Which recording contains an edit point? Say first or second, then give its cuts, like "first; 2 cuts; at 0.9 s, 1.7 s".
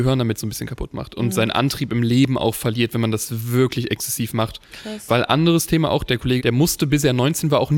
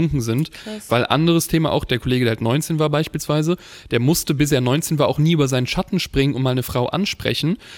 first; 2 cuts; at 4.7 s, 6.4 s